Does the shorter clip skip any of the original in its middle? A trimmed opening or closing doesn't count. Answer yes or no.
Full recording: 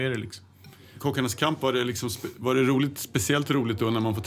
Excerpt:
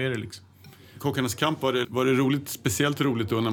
yes